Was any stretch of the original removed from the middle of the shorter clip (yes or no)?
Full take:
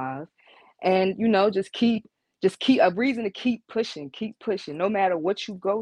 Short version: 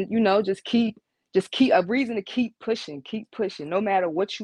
no